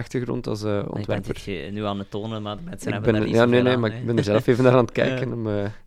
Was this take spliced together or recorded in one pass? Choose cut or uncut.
uncut